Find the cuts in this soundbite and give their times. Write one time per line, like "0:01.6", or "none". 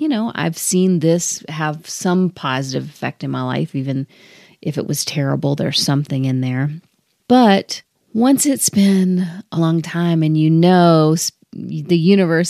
0:09.6